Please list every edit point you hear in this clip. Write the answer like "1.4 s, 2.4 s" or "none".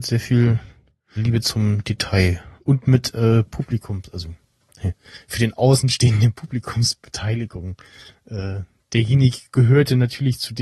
1.2 s